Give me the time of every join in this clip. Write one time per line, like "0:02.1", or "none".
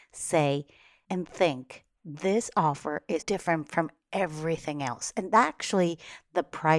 0:03.2